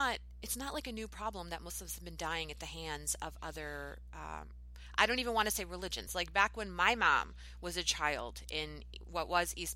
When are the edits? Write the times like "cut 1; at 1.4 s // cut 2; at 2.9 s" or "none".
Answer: cut 1; at 6.1 s